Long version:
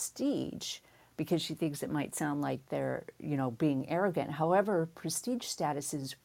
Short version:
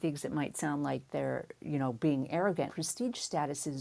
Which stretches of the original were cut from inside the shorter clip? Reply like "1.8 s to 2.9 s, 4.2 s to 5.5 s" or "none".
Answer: 4.3 s to 4.9 s